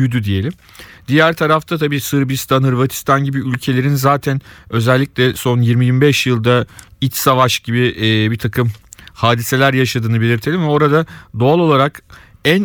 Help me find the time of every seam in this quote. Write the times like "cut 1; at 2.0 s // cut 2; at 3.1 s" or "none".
none